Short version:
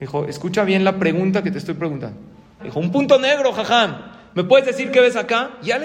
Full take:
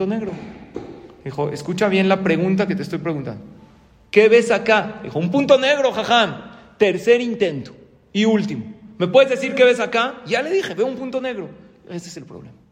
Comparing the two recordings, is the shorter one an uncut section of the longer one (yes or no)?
no